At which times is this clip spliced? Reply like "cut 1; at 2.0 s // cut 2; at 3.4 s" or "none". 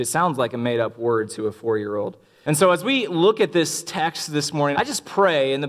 cut 1; at 2.4 s // cut 2; at 4.7 s